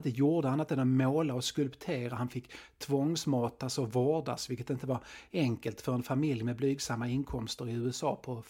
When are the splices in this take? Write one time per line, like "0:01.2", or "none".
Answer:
none